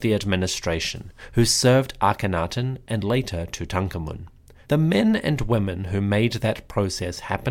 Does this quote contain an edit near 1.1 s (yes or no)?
no